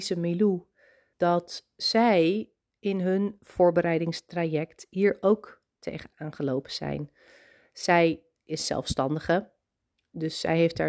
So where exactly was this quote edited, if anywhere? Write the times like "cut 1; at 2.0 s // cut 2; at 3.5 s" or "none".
cut 1; at 1.1 s

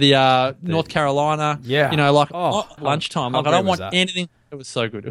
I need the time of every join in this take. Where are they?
cut 1; at 2.8 s

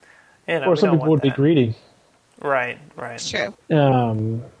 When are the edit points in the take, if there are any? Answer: cut 1; at 3.5 s

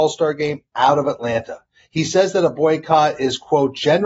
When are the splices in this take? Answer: none

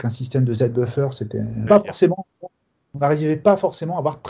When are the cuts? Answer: cut 1; at 1.7 s

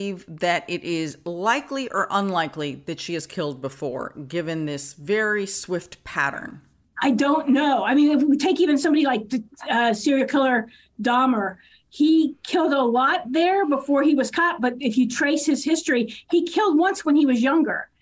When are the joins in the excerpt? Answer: none

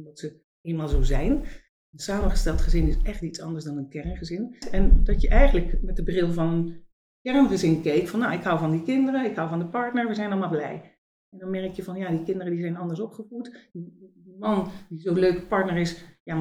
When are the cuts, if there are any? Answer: cut 1; at 4.6 s

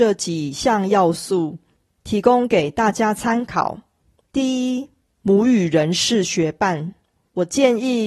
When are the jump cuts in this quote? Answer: none

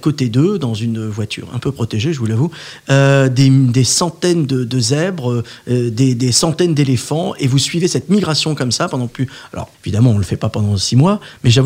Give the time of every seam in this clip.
cut 1; at 9.7 s

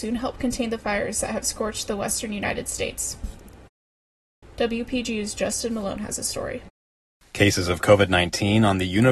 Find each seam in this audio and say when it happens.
cut 1; at 4.4 s

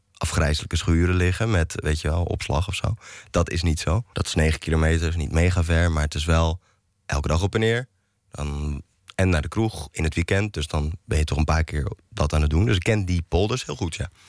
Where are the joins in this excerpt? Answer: cut 1; at 4.1 s

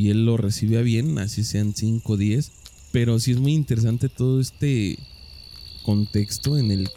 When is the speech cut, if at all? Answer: cut 1; at 2.8 s

